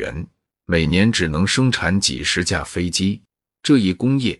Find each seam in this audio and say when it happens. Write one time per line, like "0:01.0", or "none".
0:03.4